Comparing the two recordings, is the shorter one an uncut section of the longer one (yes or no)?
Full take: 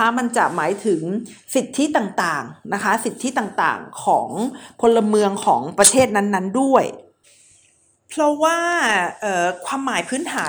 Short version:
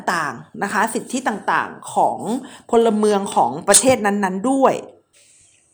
yes